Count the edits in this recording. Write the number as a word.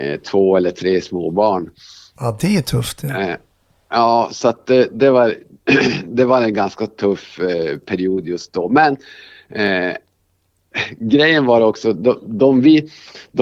zero